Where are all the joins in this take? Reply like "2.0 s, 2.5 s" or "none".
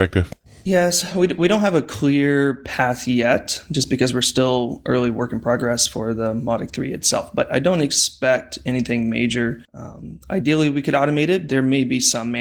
9.6 s, 11.5 s